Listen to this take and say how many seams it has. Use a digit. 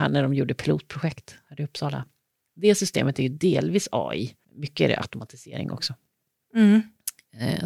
1